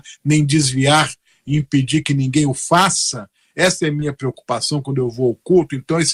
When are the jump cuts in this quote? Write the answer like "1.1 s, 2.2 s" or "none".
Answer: none